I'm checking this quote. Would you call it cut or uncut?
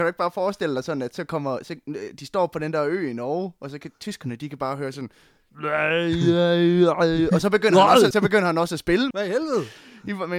cut